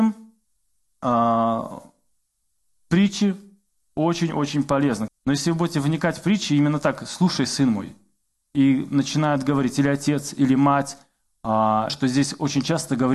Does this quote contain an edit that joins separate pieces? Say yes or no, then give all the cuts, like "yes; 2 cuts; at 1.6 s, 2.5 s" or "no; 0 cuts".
yes; 2 cuts; at 5.1 s, 11.9 s